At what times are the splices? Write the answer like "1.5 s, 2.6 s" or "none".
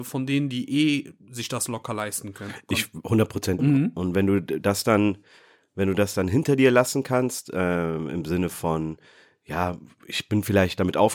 3.6 s